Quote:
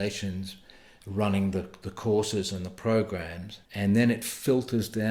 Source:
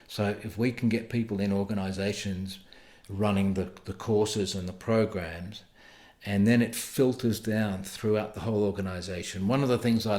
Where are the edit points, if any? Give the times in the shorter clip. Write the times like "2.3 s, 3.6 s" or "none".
3.6 s